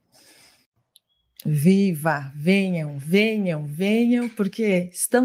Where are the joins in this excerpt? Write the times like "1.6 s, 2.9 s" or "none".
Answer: none